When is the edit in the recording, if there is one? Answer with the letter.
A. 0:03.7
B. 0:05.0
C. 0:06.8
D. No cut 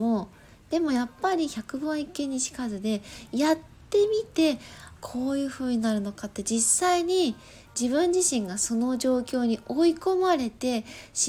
B